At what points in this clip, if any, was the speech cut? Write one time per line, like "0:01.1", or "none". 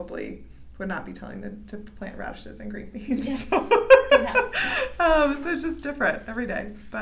none